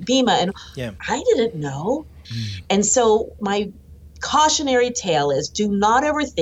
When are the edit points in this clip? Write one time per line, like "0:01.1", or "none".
0:01.0
0:02.2
0:03.4